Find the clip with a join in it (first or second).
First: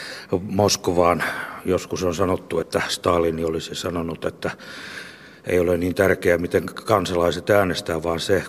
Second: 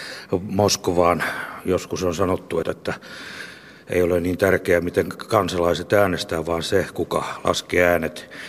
second